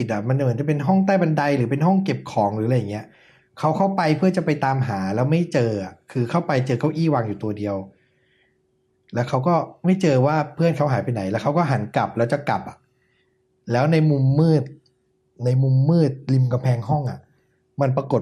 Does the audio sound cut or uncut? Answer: uncut